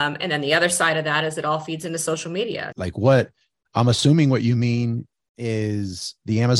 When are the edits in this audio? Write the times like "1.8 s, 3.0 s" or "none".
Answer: 2.7 s